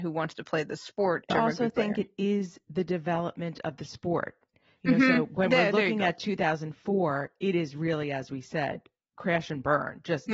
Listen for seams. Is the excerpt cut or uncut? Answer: uncut